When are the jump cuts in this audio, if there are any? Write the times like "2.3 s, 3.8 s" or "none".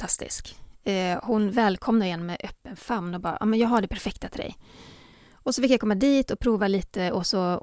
none